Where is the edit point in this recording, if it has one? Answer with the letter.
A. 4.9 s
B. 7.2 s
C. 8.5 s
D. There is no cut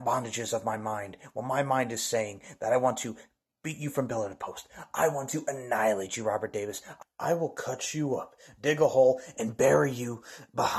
C